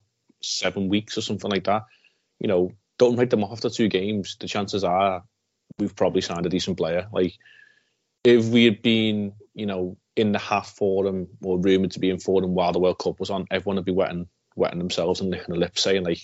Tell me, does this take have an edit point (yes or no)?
no